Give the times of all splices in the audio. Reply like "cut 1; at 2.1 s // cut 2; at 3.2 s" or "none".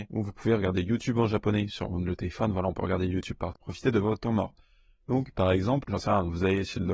cut 1; at 3.6 s